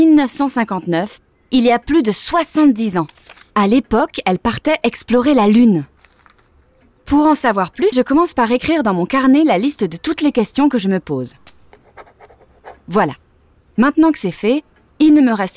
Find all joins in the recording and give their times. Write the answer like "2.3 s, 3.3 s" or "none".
7.9 s